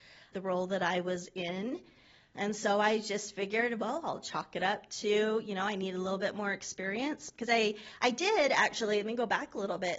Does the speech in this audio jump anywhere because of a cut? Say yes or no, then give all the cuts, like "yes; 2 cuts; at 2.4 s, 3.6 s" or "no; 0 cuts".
no; 0 cuts